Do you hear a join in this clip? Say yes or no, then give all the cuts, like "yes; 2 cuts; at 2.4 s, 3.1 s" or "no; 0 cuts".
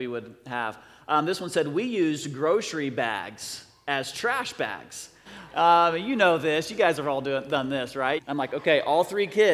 yes; 2 cuts; at 5.3 s, 8.2 s